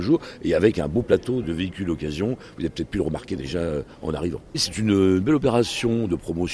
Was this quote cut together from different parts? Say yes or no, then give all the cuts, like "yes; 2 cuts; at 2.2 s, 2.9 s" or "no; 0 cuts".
yes; 1 cut; at 1.4 s